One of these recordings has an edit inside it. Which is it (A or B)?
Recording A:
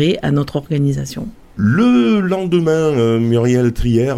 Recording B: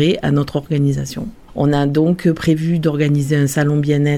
B